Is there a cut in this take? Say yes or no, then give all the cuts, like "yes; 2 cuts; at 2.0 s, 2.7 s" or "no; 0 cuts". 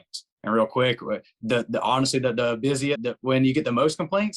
yes; 1 cut; at 2.9 s